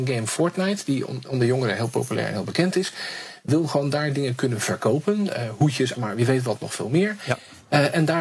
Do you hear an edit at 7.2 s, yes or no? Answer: no